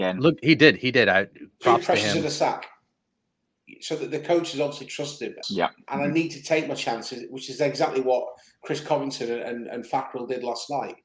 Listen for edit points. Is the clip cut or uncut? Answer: cut